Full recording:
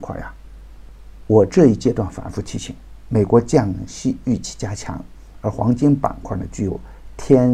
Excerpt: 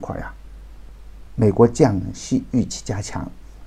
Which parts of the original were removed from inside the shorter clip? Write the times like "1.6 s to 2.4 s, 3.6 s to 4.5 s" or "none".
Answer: 1.3 s to 3.0 s